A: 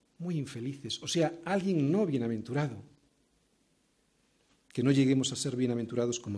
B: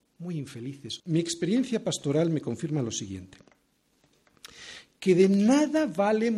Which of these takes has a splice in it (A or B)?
B